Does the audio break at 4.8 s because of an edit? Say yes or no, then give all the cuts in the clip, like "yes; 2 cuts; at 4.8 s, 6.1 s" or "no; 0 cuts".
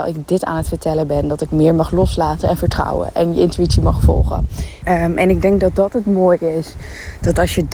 yes; 1 cut; at 4.8 s